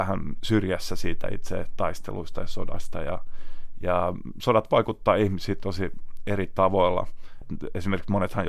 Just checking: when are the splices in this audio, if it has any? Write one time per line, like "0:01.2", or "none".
none